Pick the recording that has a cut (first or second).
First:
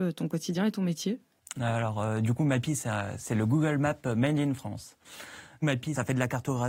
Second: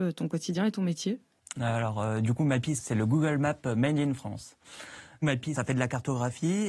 second